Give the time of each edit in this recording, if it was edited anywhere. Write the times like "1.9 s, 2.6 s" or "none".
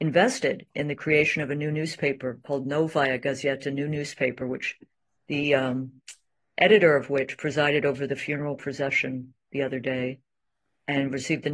none